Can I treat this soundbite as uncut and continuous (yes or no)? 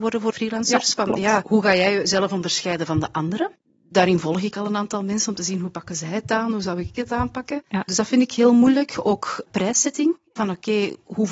yes